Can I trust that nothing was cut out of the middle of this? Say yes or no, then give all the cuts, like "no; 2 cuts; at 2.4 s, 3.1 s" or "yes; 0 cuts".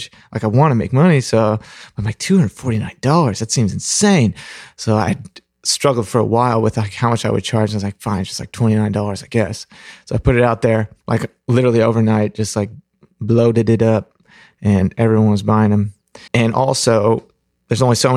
no; 1 cut; at 16.3 s